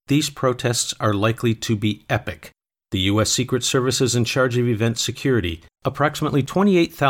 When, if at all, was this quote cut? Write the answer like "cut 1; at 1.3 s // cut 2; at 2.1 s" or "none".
cut 1; at 2.8 s // cut 2; at 5.7 s